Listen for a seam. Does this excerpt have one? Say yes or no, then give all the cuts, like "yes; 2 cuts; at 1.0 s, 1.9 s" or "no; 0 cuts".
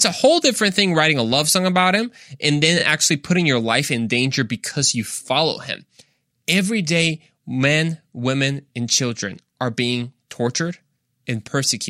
no; 0 cuts